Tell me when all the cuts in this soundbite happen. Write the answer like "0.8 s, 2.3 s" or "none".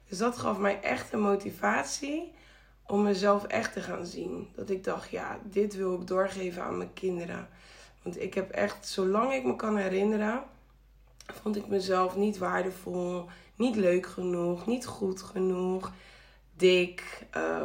none